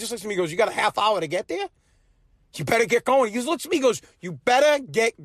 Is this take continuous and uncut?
yes; 0 cuts

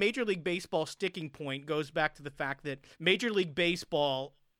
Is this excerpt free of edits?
no; 1 cut; at 2.9 s

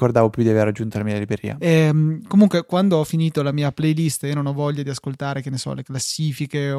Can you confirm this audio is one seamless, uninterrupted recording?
no; 1 cut; at 1.6 s

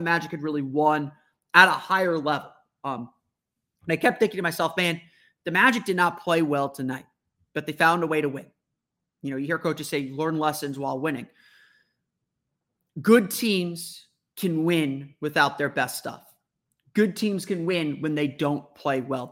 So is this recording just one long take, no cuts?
yes; 0 cuts

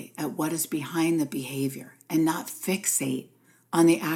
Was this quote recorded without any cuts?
yes; 0 cuts

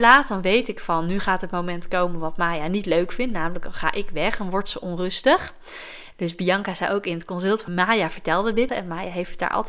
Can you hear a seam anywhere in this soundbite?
yes; 3 cuts; at 6.1 s, 7.7 s, 8.7 s

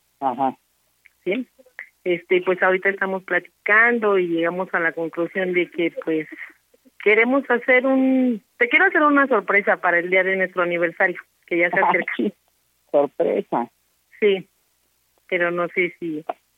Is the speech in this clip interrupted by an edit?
no; 0 cuts

